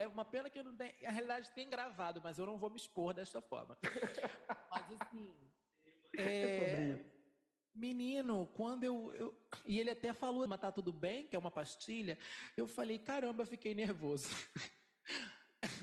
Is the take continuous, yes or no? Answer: no